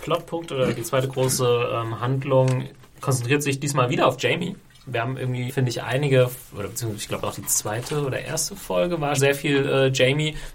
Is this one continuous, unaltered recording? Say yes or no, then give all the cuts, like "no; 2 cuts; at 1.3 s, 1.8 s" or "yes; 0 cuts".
no; 2 cuts; at 5.5 s, 9.2 s